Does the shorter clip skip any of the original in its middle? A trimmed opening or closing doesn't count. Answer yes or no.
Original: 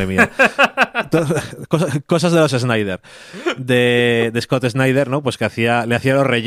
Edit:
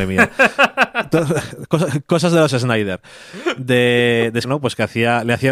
yes